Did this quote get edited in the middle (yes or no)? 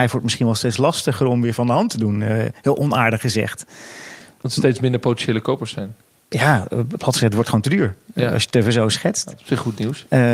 no